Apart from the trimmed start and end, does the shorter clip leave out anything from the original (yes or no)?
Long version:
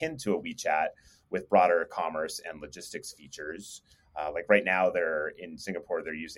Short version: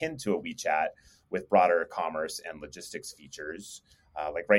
no